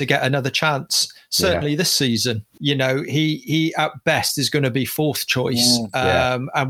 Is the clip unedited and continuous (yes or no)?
no